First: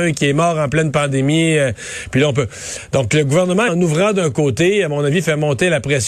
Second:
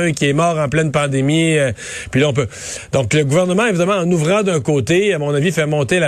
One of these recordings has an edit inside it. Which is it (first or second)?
first